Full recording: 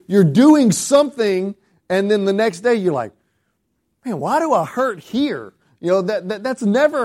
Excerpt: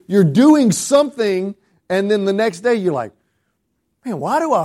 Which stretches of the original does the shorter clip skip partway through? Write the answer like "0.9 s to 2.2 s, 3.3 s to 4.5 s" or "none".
none